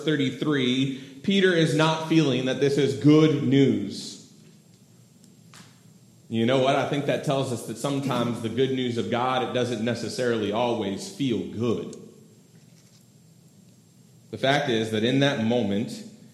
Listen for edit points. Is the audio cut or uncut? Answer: uncut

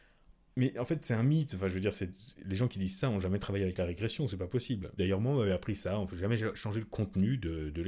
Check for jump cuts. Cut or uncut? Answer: cut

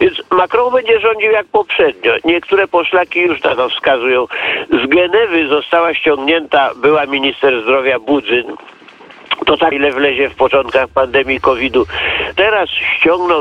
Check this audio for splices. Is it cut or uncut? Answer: cut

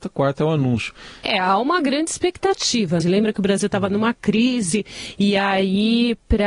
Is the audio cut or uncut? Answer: cut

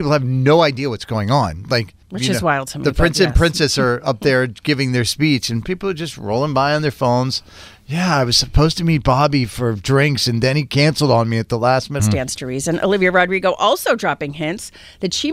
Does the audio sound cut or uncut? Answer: cut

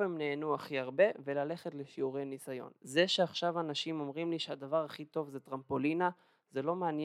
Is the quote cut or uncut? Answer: cut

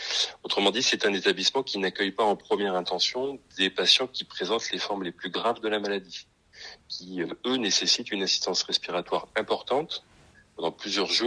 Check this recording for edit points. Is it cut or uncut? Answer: uncut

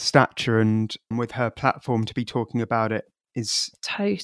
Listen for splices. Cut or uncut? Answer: cut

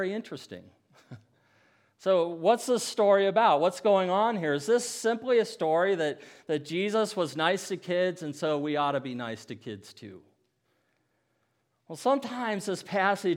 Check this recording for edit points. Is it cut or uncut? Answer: uncut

